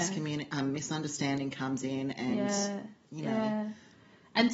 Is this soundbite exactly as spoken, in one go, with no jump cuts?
yes; 0 cuts

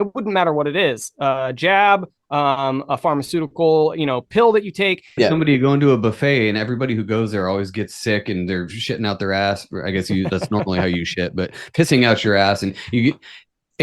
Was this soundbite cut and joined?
yes; 1 cut; at 5.2 s

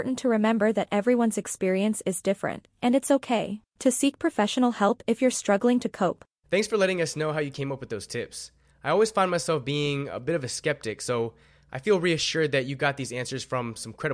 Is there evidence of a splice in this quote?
yes; 1 cut; at 6.4 s

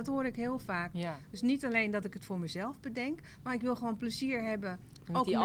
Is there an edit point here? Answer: yes; 1 cut; at 0.9 s

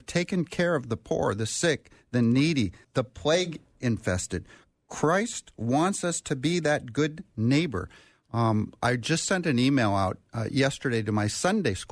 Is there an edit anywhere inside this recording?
yes; 1 cut; at 2.8 s

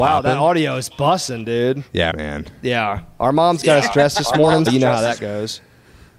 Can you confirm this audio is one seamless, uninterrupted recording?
no; 2 cuts; at 2.1 s, 4.7 s

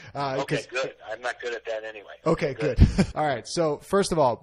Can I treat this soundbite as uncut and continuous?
no; 1 cut; at 3.1 s

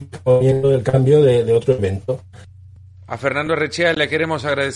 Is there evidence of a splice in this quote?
no; 0 cuts

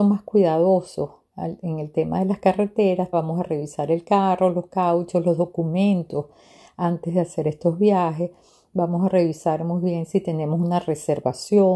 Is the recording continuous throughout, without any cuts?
no; 1 cut; at 3.1 s

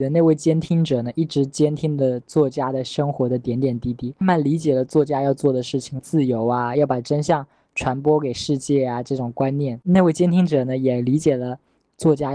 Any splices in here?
yes; 2 cuts; at 4.2 s, 6.0 s

